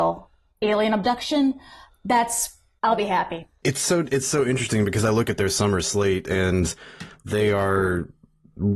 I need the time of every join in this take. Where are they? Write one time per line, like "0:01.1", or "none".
none